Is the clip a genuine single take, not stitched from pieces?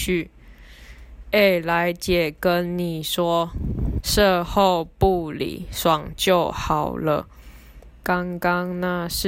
no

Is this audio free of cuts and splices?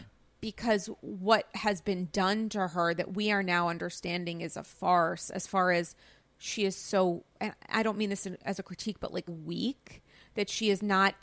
no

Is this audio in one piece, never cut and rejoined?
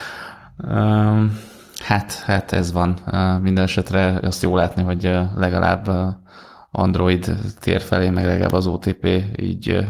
yes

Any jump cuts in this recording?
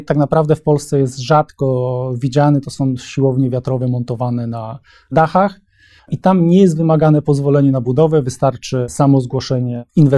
yes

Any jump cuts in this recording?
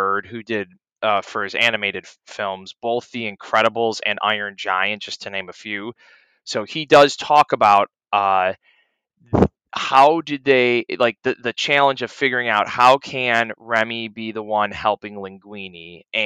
no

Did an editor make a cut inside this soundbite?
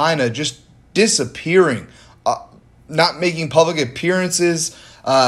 no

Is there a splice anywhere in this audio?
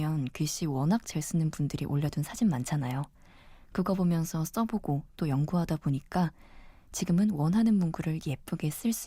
no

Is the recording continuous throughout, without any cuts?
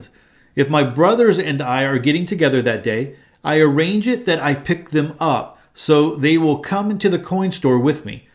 yes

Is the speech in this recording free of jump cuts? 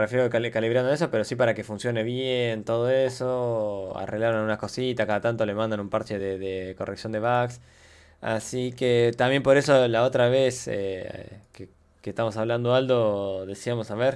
yes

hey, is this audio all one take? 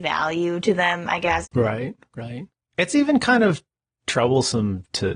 no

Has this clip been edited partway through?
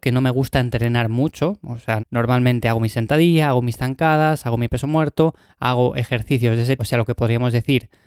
yes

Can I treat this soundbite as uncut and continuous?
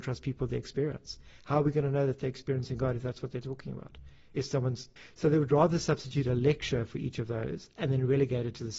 yes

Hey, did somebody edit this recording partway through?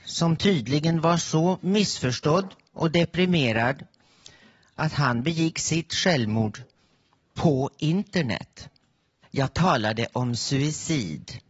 yes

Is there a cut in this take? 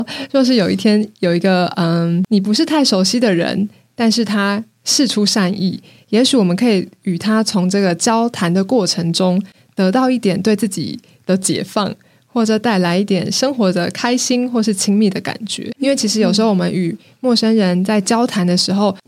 no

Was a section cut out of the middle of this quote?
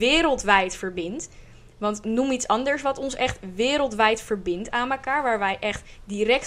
no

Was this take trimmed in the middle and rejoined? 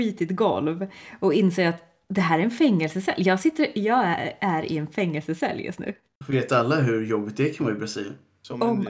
no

